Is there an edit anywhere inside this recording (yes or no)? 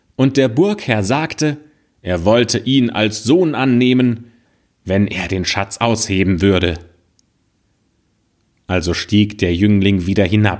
no